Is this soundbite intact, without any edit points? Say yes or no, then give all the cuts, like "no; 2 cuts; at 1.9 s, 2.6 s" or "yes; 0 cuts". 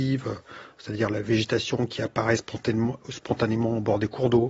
yes; 0 cuts